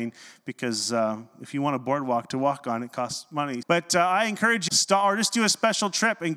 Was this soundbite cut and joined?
yes; 2 cuts; at 3.6 s, 4.7 s

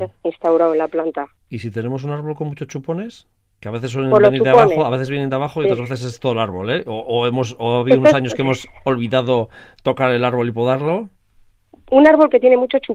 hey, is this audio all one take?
yes; 0 cuts

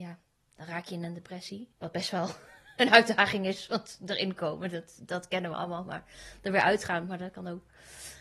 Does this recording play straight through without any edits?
no; 1 cut; at 1.7 s

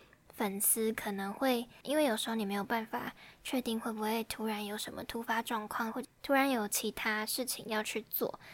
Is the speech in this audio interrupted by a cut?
yes; 2 cuts; at 1.8 s, 5.9 s

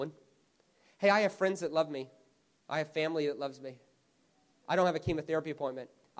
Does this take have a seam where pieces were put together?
no; 0 cuts

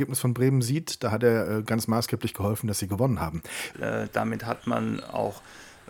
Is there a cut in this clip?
yes; 1 cut; at 3.7 s

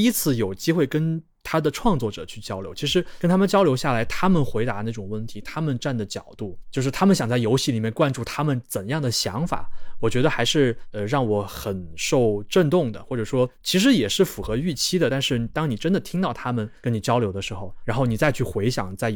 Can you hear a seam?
no; 0 cuts

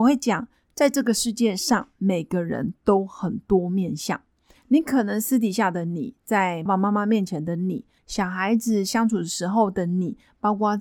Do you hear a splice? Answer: yes; 2 cuts; at 6.7 s, 8.0 s

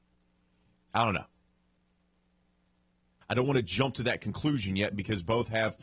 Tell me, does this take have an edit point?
yes; 1 cut; at 3.2 s

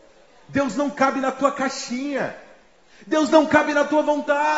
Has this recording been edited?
no; 0 cuts

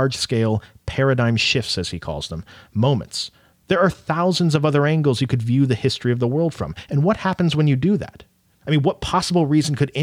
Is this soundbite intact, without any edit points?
no; 2 cuts; at 3.5 s, 8.5 s

